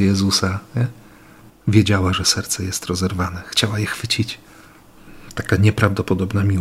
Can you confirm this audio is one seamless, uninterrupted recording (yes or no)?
no